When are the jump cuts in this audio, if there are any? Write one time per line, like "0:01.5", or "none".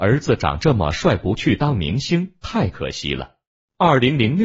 none